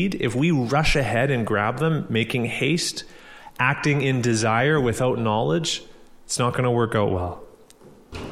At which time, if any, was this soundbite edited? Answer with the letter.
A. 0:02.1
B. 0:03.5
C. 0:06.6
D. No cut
D